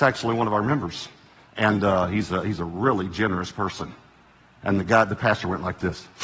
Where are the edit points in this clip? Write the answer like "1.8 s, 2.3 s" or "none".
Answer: none